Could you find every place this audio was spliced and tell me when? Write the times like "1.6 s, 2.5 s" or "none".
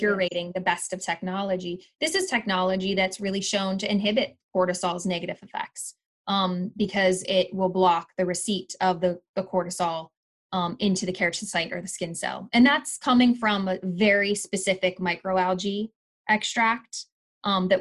none